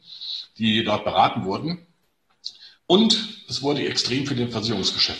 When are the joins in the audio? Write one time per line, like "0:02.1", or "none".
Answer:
0:02.7